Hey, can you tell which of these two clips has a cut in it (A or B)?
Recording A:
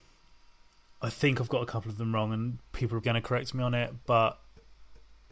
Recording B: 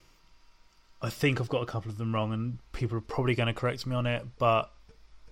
A